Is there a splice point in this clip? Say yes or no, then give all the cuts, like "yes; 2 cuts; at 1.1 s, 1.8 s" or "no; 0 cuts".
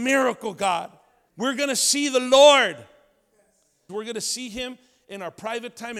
yes; 2 cuts; at 1.3 s, 3.9 s